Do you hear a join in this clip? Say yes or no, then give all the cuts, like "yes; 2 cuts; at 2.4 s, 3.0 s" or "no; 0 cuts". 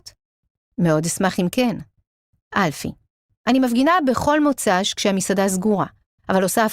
no; 0 cuts